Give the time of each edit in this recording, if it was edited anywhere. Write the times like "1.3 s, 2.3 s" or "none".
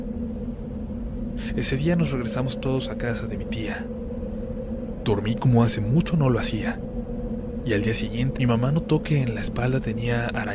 8.4 s